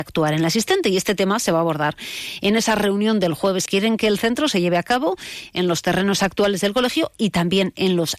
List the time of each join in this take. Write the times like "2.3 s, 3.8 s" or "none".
3.6 s